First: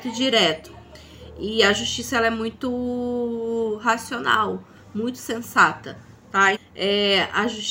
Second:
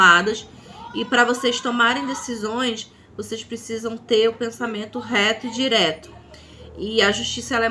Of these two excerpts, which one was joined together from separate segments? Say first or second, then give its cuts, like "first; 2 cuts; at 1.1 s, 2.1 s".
first; 1 cut; at 6.6 s